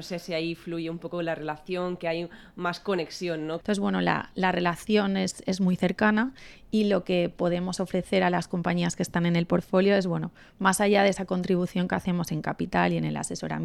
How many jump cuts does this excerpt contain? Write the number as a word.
one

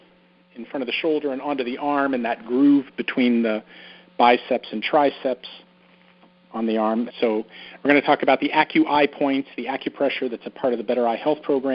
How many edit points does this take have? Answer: one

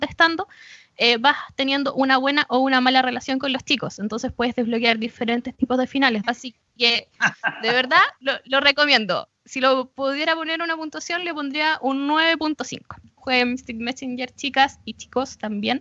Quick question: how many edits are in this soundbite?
two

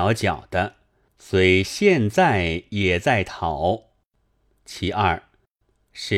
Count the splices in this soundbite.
one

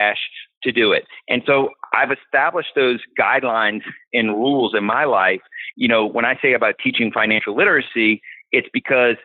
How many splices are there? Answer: one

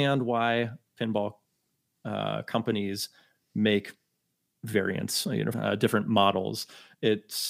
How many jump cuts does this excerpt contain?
one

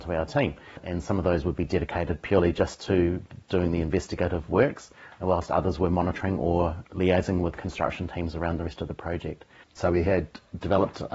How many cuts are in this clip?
one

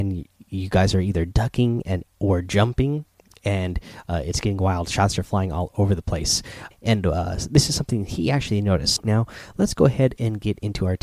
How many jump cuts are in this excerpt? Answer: two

